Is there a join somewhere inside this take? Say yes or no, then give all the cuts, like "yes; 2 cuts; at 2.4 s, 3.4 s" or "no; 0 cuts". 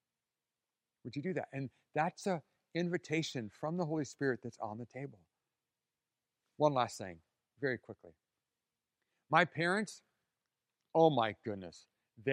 no; 0 cuts